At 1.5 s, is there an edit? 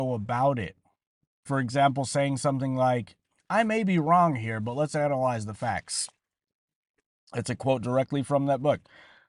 yes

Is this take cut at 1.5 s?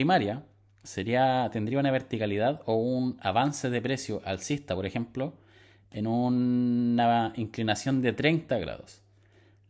no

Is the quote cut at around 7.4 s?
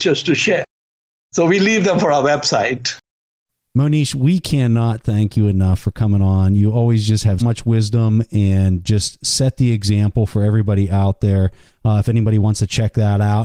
yes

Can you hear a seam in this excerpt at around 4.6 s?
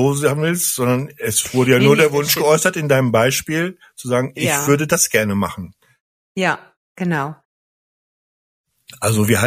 no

